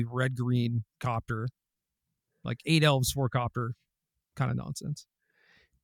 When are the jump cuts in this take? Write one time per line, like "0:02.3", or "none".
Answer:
none